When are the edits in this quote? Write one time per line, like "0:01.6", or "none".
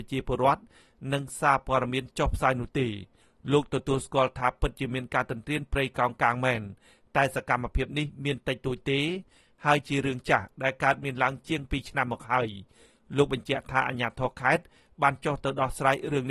none